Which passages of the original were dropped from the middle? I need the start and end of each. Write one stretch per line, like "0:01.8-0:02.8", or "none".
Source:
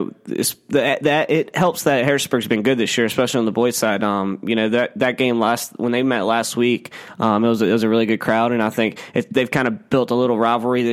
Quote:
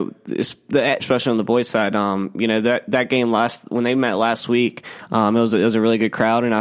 0:01.0-0:03.1